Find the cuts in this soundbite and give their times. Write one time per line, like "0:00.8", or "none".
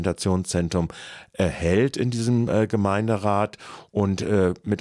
none